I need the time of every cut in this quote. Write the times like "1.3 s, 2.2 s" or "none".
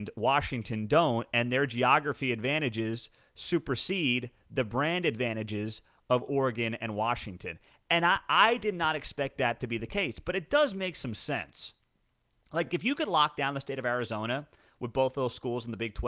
none